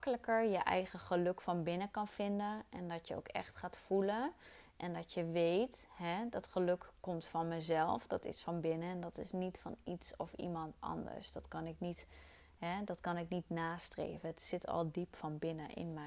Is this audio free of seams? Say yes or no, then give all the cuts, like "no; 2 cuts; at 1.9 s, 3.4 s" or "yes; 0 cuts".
yes; 0 cuts